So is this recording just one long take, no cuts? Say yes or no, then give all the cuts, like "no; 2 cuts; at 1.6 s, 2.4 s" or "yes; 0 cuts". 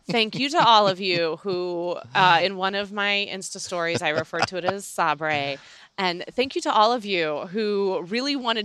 yes; 0 cuts